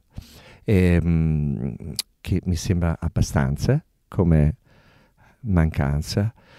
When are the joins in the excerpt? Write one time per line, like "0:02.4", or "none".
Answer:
0:02.1